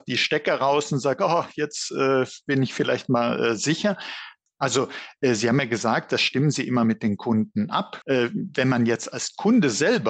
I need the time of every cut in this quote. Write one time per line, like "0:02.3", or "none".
0:04.5
0:08.0

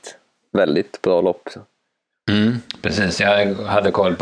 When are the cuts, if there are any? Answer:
none

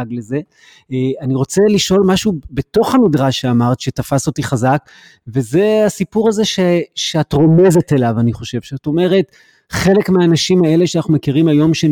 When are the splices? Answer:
none

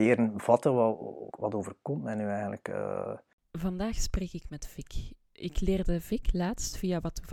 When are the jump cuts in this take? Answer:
0:01.3

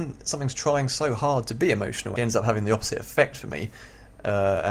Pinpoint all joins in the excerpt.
0:02.2

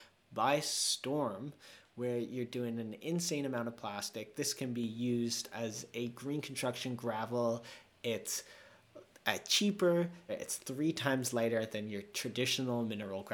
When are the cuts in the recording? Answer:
0:10.3

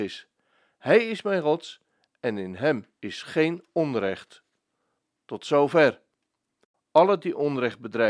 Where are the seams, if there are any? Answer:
0:06.7

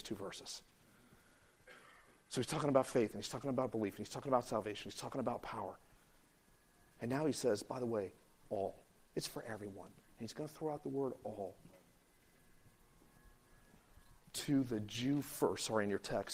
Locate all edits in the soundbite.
0:14.2

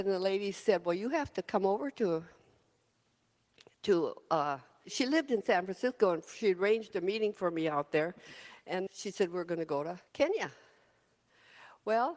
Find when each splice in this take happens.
0:04.8
0:08.9
0:10.1

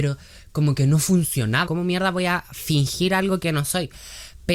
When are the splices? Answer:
0:01.7

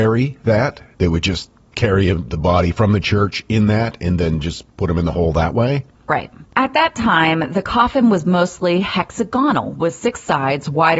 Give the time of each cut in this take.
0:06.4

